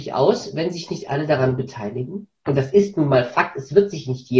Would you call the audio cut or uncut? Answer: uncut